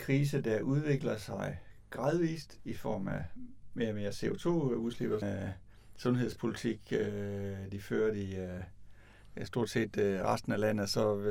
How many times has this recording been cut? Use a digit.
1